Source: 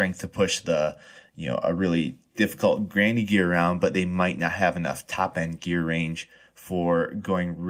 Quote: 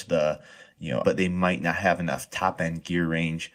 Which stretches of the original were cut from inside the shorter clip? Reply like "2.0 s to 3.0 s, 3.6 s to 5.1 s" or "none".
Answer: 1.6 s to 3.8 s